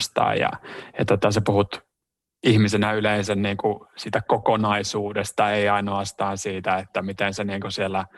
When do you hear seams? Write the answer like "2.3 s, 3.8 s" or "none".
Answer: none